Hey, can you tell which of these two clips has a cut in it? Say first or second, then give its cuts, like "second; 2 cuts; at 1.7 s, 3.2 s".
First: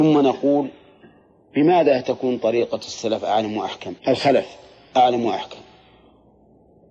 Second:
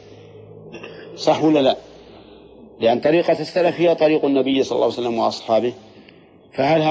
first; 1 cut; at 4.0 s